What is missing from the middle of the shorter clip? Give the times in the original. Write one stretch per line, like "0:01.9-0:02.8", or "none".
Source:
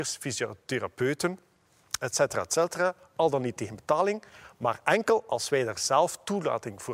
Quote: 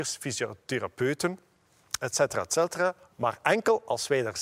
0:03.1-0:04.5